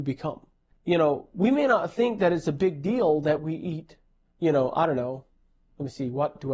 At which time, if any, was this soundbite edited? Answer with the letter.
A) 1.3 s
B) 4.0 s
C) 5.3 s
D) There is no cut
D